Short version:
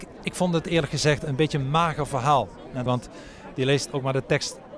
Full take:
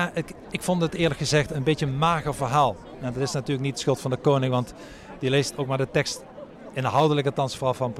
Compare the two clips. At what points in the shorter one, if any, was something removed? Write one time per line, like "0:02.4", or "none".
0:02.9